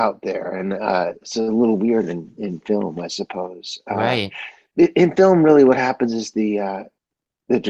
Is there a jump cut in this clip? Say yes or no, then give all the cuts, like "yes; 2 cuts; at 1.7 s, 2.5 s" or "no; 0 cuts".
no; 0 cuts